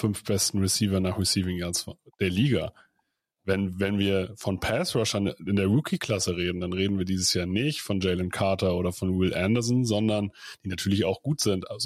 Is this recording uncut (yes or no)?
yes